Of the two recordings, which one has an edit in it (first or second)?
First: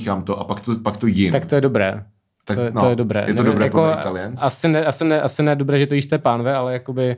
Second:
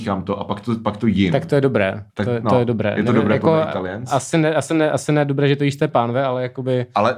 second